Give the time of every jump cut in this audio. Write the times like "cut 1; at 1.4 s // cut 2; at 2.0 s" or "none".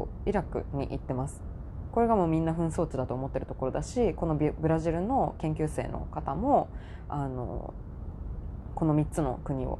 none

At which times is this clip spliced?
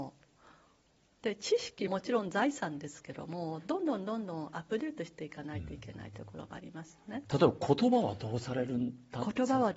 cut 1; at 1.9 s // cut 2; at 7.3 s

